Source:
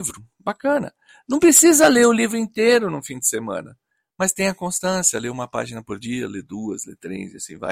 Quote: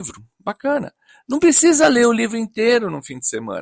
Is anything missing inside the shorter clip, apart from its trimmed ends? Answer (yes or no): no